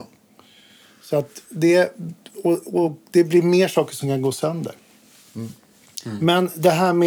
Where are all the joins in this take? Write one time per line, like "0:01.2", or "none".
none